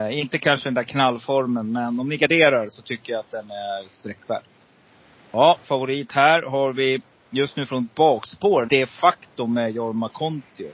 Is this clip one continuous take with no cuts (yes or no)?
no